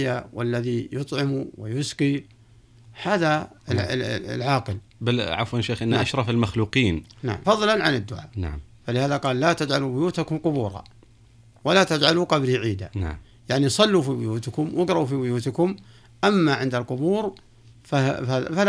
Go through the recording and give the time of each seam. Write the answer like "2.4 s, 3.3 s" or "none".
7.4 s